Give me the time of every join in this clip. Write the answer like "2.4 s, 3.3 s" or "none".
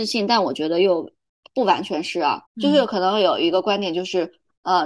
2.5 s